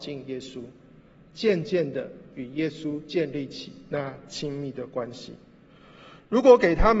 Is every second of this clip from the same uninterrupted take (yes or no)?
yes